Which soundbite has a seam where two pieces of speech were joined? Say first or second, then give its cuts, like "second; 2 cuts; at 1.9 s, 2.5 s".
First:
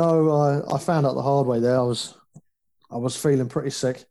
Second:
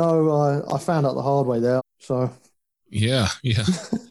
second; 1 cut; at 1.8 s